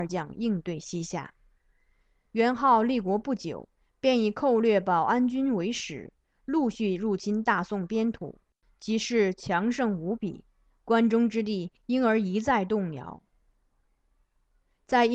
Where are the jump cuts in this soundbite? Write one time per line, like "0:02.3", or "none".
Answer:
none